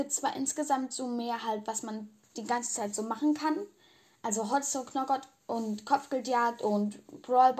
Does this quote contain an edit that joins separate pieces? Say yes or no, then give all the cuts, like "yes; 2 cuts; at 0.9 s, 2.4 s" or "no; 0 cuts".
no; 0 cuts